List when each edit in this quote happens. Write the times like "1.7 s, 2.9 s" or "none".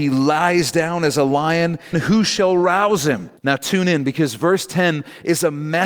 1.9 s, 3.4 s